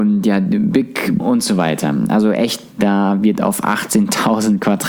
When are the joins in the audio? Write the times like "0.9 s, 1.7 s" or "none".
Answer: 1.2 s, 2.7 s